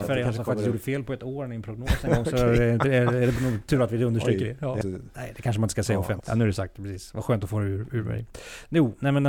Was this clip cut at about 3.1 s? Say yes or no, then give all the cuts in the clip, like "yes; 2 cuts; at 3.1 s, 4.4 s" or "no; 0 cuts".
no; 2 cuts; at 4.8 s, 6.2 s